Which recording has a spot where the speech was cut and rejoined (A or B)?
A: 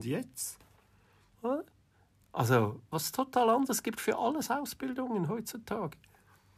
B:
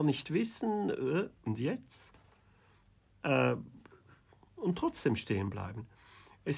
A